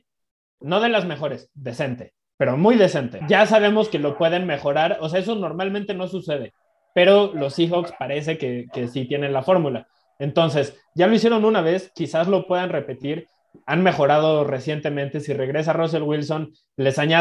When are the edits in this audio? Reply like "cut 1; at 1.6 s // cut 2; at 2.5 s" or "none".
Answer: cut 1; at 3.2 s